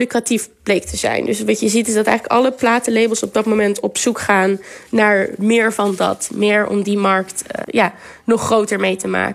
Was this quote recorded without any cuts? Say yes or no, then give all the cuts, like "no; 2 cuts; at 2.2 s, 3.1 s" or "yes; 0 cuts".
no; 1 cut; at 7.6 s